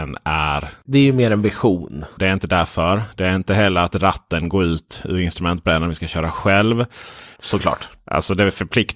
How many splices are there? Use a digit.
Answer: 2